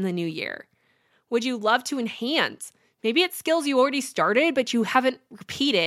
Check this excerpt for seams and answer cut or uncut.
cut